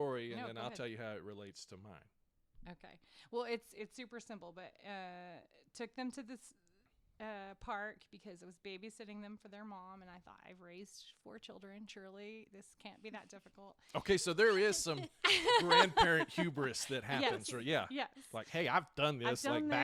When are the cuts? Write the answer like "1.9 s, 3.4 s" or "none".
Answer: none